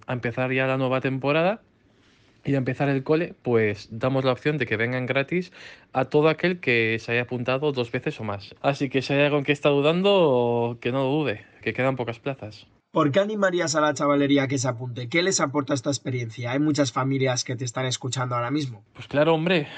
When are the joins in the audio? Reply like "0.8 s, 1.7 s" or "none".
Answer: 8.6 s, 11.6 s